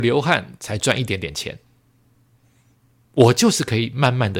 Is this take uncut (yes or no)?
yes